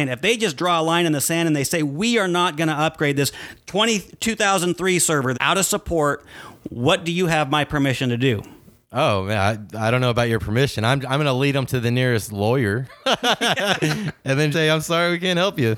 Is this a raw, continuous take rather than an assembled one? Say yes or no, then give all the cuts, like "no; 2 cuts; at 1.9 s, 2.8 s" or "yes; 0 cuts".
no; 2 cuts; at 5.3 s, 14.5 s